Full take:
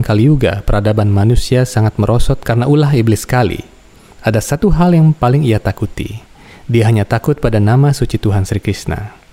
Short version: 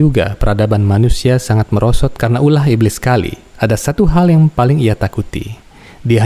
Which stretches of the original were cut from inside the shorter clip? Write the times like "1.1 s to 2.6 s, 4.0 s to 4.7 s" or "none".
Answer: 3.7 s to 4.1 s